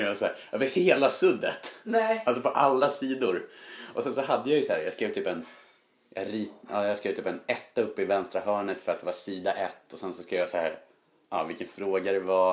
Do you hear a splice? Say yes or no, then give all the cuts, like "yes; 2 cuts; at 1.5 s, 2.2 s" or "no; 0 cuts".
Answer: no; 0 cuts